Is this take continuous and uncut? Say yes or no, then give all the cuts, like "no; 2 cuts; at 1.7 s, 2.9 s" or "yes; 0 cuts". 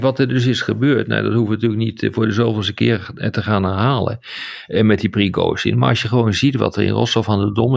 yes; 0 cuts